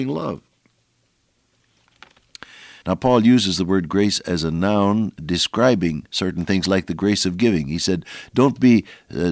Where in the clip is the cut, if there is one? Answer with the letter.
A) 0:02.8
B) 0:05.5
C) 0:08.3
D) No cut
A